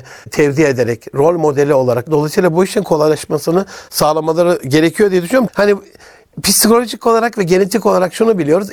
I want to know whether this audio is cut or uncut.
cut